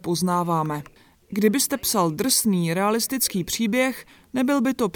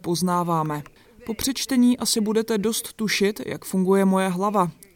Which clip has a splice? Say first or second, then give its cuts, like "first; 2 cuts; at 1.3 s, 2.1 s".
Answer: second; 1 cut; at 1.0 s